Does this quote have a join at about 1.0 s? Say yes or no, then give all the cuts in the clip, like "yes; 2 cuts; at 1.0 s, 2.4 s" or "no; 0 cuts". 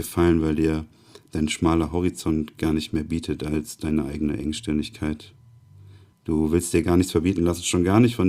no; 1 cut; at 6.1 s